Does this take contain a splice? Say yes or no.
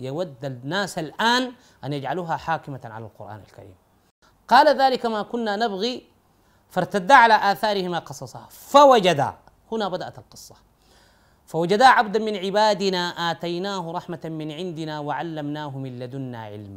no